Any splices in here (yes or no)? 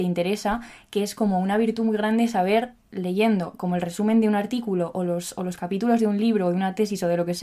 no